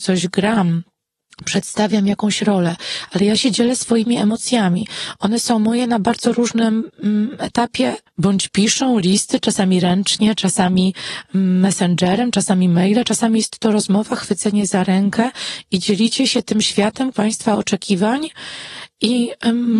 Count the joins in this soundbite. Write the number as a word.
two